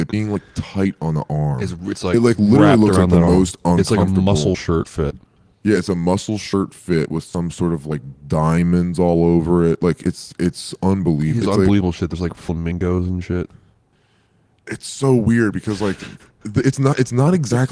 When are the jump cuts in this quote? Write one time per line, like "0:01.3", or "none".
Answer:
0:11.4